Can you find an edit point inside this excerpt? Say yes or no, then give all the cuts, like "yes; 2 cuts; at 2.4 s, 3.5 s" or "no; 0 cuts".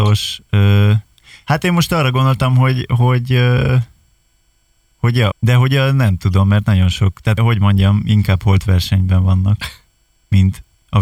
yes; 2 cuts; at 5.3 s, 7.4 s